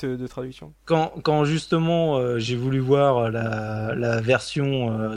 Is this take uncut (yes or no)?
yes